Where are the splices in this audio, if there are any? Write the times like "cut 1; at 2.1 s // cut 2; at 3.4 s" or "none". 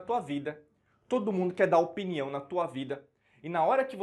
none